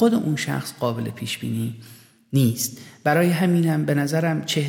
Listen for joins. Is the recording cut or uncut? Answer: uncut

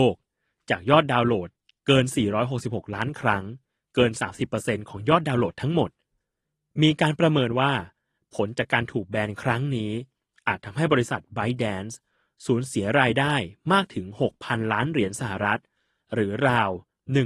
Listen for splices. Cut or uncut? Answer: uncut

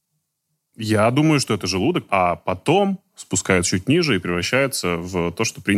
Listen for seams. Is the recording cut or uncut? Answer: cut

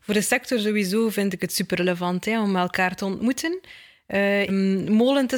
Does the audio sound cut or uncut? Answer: cut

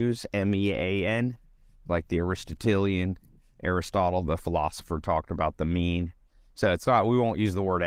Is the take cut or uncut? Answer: uncut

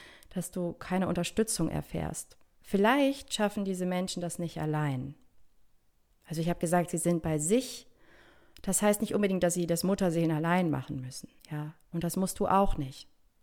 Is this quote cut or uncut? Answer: cut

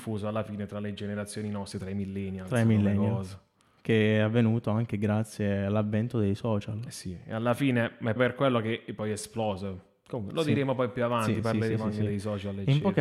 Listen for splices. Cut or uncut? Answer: cut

